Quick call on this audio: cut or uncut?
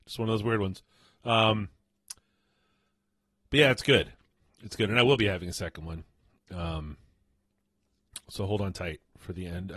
uncut